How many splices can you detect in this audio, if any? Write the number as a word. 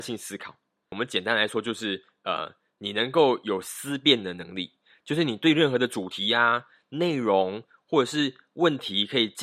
one